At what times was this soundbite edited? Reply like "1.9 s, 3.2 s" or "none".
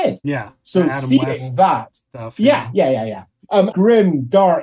3.7 s